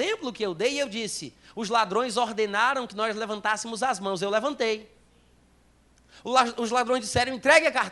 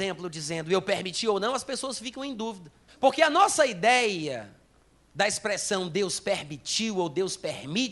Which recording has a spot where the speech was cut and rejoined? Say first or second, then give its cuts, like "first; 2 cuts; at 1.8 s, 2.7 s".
second; 1 cut; at 2.9 s